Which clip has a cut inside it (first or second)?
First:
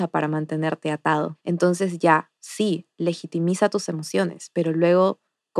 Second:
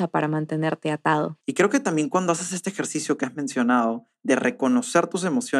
second